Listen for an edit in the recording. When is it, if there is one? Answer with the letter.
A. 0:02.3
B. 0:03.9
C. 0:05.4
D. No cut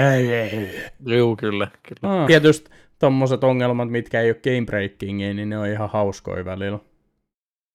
A